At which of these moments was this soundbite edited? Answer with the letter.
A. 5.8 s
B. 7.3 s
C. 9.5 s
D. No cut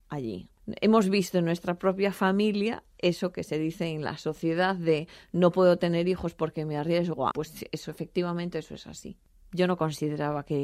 B